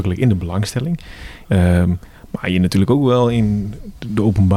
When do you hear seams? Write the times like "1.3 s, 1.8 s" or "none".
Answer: 1.4 s